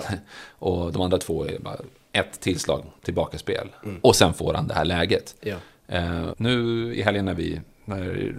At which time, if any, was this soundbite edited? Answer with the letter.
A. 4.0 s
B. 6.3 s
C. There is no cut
B